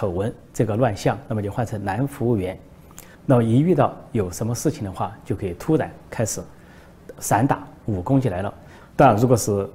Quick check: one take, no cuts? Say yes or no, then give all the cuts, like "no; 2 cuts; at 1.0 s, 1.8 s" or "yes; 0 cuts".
no; 2 cuts; at 3.1 s, 8.8 s